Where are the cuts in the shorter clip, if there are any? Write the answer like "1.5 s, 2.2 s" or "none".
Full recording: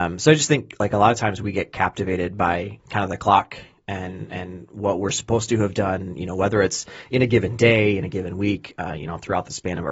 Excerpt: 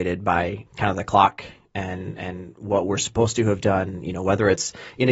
none